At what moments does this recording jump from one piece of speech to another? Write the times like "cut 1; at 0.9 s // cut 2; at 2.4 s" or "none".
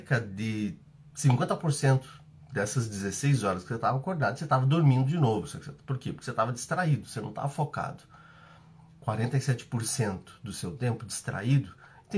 none